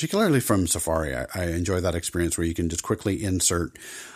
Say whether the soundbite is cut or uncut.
uncut